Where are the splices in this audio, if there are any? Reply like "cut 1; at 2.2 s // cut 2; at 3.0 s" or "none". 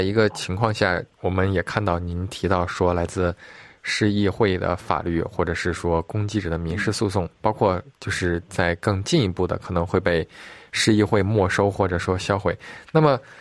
cut 1; at 1.1 s

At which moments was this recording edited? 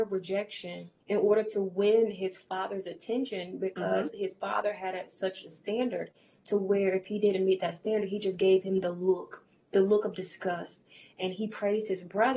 cut 1; at 1.0 s

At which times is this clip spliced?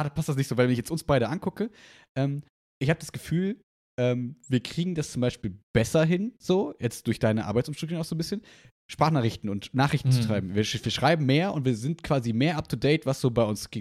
none

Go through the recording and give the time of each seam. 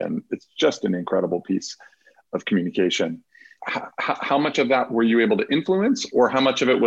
cut 1; at 3.6 s

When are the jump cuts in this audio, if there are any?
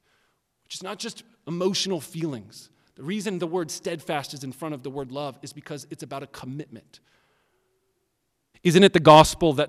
cut 1; at 8.5 s

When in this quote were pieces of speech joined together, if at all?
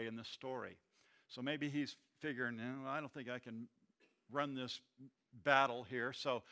none

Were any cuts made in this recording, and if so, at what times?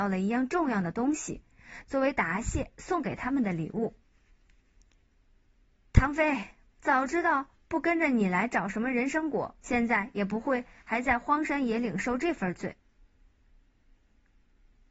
cut 1; at 6.7 s // cut 2; at 9.6 s

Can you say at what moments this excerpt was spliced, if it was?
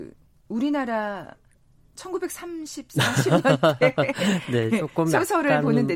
none

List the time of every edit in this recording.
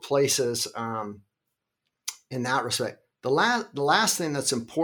none

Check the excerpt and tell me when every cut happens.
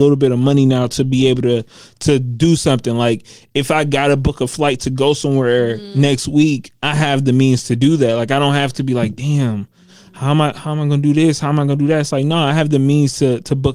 none

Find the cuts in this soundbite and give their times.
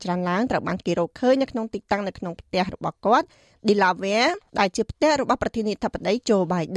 cut 1; at 4.5 s

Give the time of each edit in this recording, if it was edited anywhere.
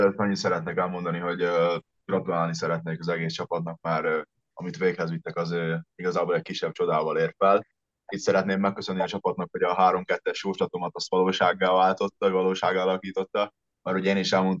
none

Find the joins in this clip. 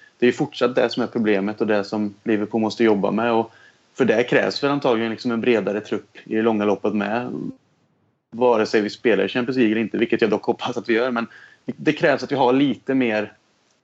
none

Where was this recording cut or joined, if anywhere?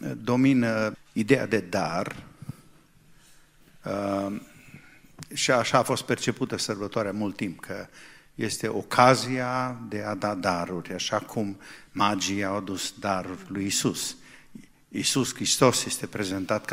cut 1; at 0.9 s

